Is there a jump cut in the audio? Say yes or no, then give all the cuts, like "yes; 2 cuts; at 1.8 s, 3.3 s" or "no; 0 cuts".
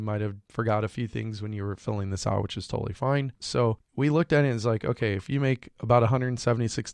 yes; 1 cut; at 3.4 s